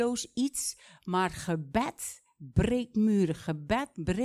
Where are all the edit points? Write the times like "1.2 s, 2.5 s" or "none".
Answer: none